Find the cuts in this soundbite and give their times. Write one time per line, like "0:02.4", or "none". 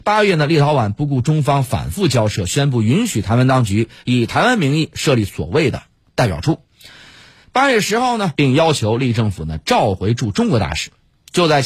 0:08.3